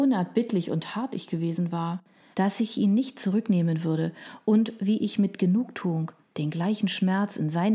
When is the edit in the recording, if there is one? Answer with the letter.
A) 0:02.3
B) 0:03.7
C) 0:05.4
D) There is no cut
A